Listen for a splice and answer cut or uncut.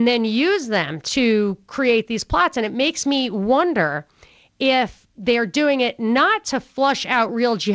uncut